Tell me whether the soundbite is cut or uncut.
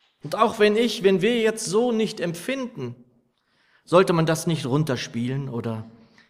uncut